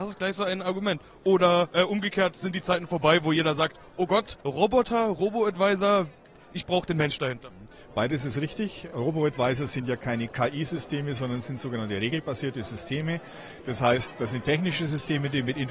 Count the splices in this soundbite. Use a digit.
0